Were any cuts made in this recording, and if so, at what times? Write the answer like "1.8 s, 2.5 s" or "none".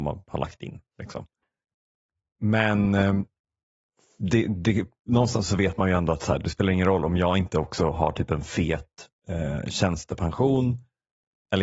none